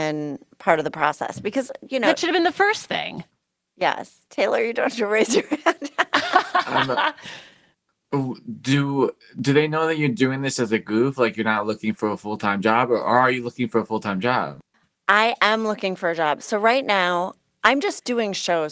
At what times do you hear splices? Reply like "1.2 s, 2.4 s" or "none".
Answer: none